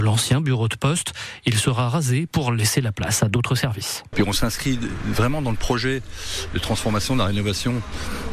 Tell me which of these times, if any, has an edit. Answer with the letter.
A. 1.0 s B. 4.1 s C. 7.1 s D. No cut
B